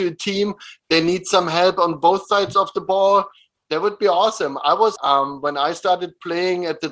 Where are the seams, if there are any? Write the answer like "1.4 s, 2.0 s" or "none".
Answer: 5.0 s